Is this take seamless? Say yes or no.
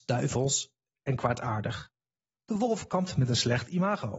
no